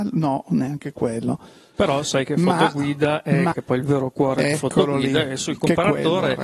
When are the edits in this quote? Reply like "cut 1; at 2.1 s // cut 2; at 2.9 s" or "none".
cut 1; at 1.7 s // cut 2; at 3.5 s